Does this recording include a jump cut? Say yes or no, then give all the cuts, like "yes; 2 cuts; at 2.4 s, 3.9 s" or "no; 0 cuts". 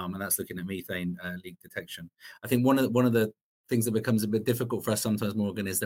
no; 0 cuts